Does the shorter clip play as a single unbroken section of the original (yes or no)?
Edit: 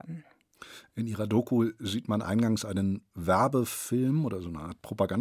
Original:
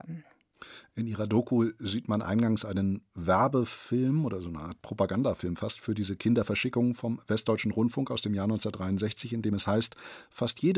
yes